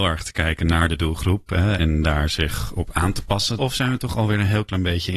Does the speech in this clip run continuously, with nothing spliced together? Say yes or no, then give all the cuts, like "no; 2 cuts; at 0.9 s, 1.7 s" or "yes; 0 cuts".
no; 2 cuts; at 1.8 s, 3.6 s